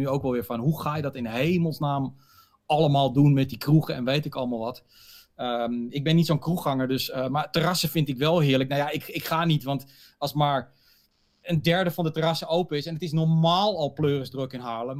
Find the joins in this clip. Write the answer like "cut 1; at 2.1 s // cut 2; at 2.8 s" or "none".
none